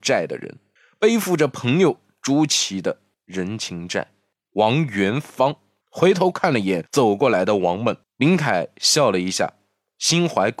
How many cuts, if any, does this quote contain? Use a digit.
2